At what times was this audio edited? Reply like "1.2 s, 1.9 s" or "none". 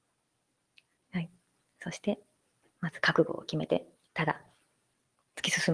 2.6 s, 4.1 s